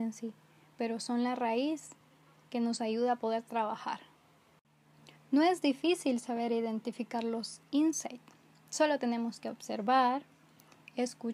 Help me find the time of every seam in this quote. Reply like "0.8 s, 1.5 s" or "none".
none